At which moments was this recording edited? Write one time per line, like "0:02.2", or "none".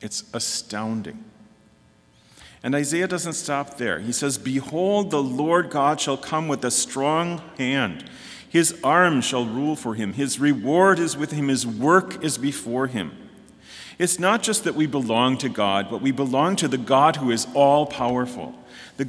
none